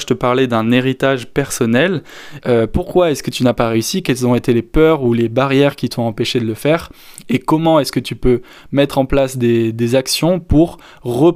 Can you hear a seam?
yes; 1 cut; at 2.4 s

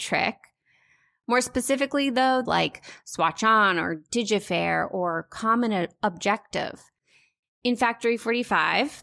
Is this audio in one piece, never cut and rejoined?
no; 1 cut; at 2.5 s

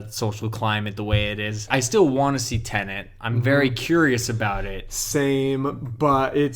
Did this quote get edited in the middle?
yes; 1 cut; at 1.7 s

